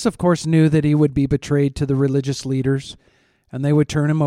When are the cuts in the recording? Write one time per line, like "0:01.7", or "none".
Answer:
none